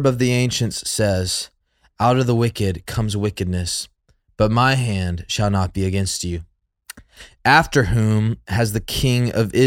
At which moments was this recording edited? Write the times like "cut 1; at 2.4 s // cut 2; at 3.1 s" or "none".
none